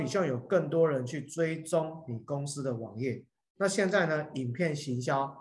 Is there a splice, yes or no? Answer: yes